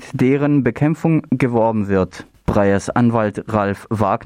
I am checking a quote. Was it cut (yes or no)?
yes